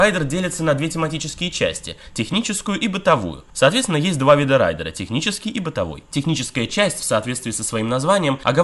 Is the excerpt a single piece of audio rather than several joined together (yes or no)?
yes